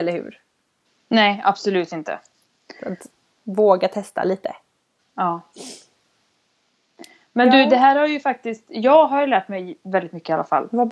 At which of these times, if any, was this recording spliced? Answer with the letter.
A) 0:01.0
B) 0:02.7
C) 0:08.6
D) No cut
D